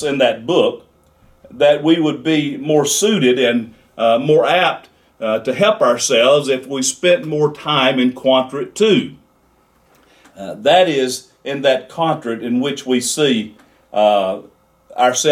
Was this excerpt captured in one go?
yes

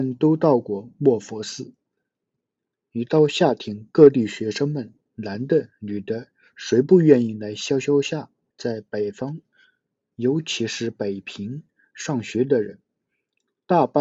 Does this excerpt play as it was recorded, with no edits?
no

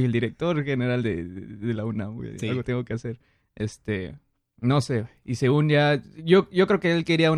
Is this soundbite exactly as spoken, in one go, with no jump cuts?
yes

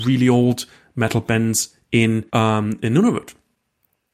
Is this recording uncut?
no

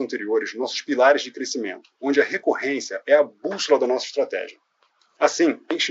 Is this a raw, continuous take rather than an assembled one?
yes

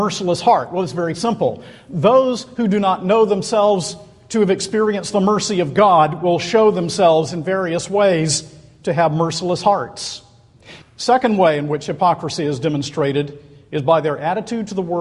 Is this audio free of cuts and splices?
no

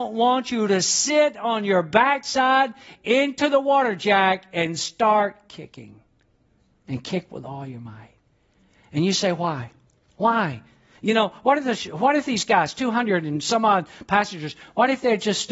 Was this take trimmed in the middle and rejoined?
no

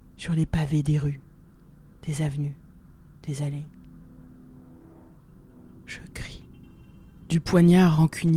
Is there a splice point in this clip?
no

